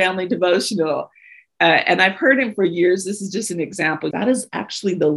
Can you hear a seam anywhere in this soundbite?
yes; 1 cut; at 4.1 s

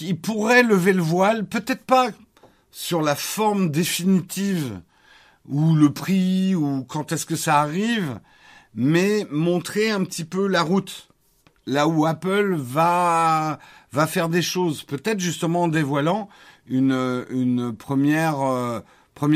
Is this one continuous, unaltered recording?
yes; 0 cuts

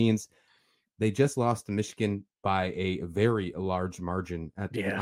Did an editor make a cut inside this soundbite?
no; 0 cuts

